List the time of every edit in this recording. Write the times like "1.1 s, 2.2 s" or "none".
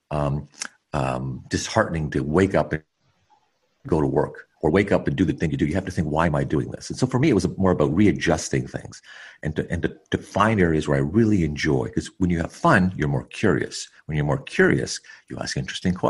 none